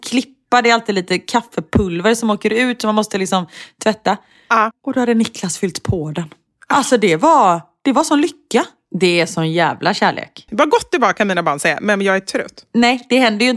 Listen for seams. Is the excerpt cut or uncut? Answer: cut